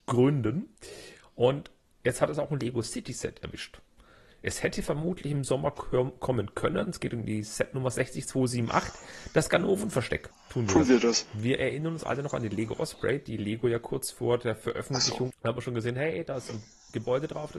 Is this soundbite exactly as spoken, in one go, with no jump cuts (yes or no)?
no